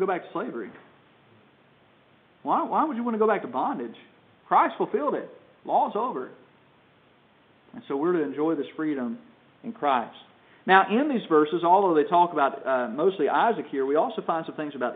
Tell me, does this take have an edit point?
yes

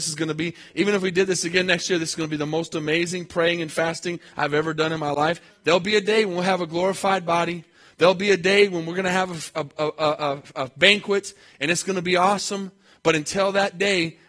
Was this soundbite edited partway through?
yes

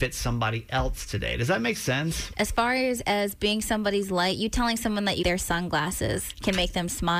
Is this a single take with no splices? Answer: no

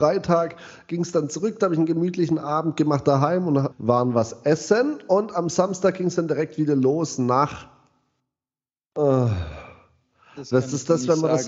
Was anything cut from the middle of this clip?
yes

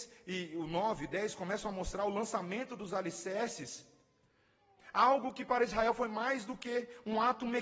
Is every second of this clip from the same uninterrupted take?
yes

